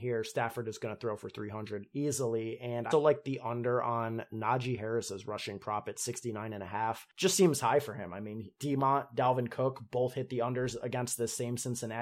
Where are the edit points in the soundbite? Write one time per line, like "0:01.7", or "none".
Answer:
0:02.9